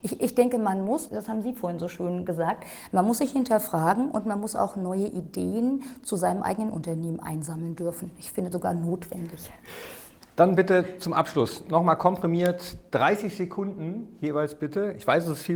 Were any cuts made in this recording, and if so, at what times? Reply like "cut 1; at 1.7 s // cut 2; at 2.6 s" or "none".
cut 1; at 1.1 s // cut 2; at 8.5 s